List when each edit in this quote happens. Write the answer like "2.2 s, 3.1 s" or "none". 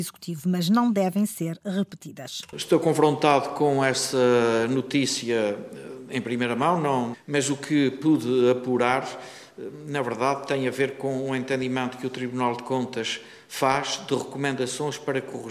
7.1 s